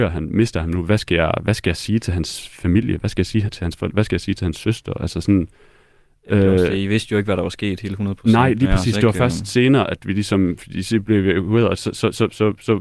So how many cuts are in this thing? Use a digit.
0